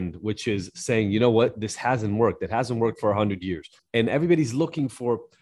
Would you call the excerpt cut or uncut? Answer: cut